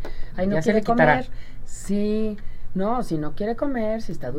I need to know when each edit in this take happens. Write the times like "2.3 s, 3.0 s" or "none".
none